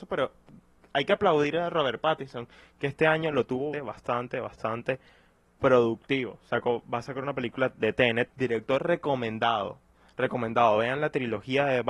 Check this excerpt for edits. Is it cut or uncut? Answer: cut